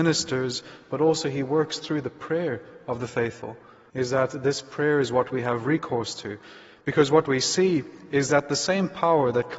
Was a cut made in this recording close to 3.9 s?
yes; 1 cut; at 3.9 s

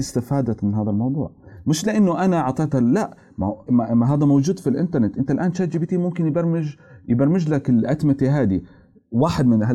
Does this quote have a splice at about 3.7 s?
yes; 1 cut; at 3.7 s

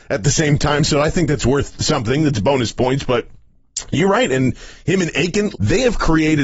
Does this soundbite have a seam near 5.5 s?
yes; 1 cut; at 5.5 s

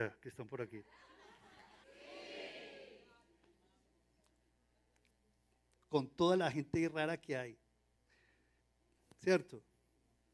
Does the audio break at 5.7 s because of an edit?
no; 1 cut; at 1.8 s

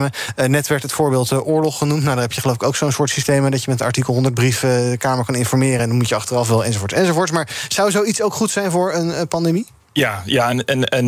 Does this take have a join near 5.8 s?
no; 0 cuts

